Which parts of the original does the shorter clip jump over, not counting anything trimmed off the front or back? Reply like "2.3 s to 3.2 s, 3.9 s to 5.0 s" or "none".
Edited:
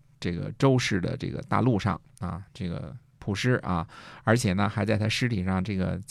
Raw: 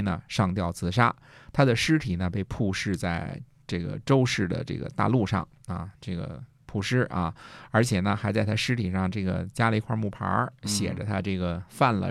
none